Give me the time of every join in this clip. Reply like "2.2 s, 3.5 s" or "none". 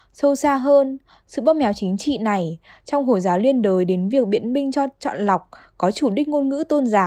none